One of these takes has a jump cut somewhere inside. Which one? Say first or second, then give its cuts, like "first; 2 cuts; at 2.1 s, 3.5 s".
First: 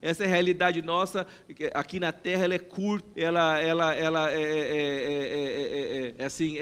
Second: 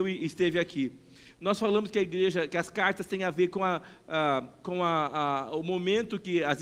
first; 1 cut; at 3.1 s